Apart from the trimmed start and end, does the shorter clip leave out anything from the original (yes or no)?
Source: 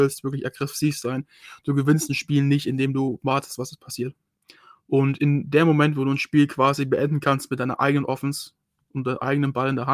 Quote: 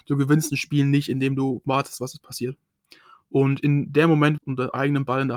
yes